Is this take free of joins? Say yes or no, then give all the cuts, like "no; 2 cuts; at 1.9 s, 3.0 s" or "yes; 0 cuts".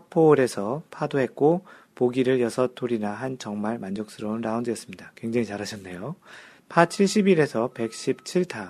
no; 1 cut; at 6.6 s